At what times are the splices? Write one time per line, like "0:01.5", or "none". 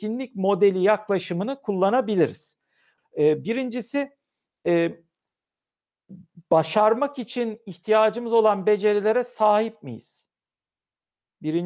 0:03.0